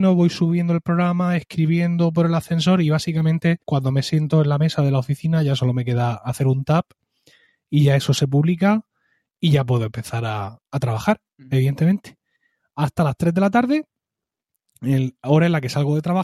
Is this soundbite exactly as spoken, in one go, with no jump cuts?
no; 1 cut; at 3.6 s

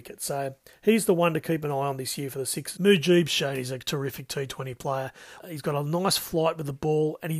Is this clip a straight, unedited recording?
no; 2 cuts; at 2.7 s, 5.4 s

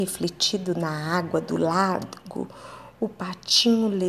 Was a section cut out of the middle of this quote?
no; 0 cuts

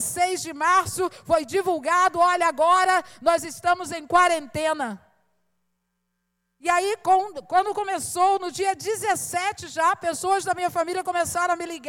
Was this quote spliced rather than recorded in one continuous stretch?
no; 0 cuts

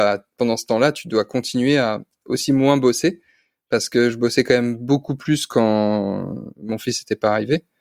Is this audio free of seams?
yes; 0 cuts

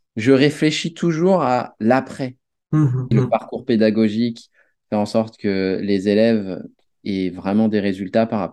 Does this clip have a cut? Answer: yes; 1 cut; at 3.1 s

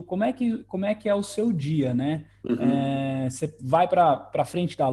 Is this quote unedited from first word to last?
yes; 0 cuts

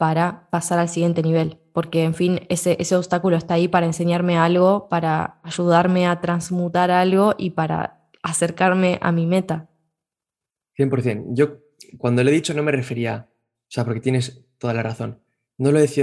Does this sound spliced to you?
no; 0 cuts

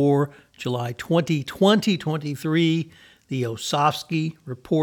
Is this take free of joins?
yes; 0 cuts

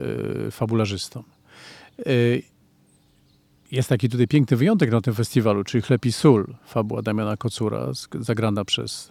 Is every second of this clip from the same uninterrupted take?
yes; 0 cuts

